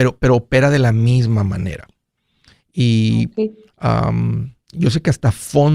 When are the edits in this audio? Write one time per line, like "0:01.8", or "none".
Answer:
none